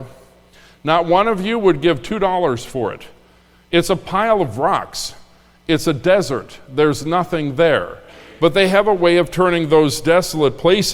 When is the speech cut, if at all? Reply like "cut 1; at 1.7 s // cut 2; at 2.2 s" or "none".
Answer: none